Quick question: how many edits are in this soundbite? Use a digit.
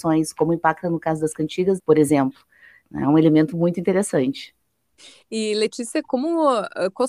1